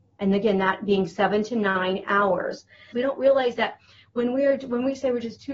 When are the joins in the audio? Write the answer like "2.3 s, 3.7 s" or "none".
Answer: 2.9 s